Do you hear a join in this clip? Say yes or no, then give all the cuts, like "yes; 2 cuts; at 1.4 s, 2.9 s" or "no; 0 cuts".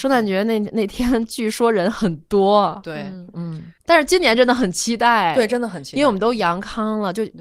yes; 1 cut; at 3.8 s